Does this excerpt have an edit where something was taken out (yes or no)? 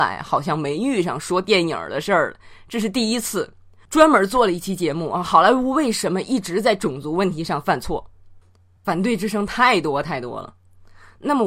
no